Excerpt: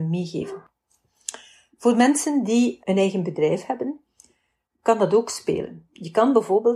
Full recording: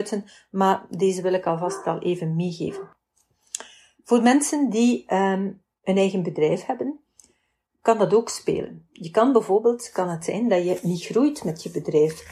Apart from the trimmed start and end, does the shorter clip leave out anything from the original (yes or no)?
yes